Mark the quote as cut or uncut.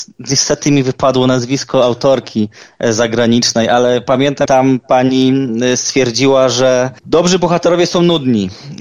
cut